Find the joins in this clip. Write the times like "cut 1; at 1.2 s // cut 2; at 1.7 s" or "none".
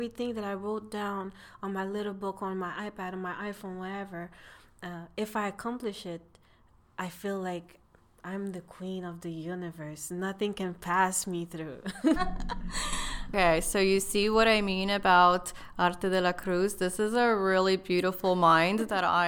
cut 1; at 12.2 s